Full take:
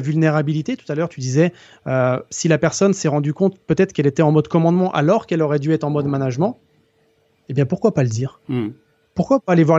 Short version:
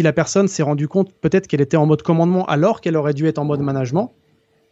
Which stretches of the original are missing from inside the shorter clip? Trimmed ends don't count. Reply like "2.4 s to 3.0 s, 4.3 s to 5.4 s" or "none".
none